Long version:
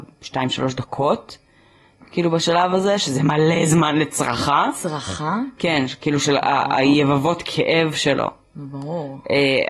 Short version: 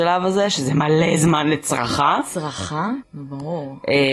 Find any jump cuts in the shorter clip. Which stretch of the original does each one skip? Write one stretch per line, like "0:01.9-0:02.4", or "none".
0:05.5-0:08.4